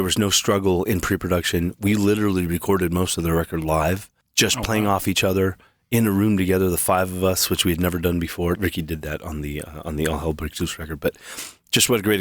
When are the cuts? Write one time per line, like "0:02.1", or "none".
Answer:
0:08.5